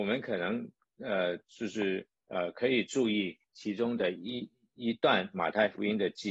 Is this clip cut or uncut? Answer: uncut